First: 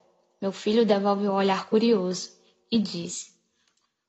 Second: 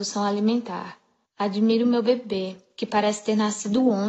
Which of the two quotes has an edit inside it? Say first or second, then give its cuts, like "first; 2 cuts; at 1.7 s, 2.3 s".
second; 2 cuts; at 1.2 s, 2.7 s